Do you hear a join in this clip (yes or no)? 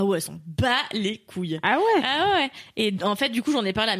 no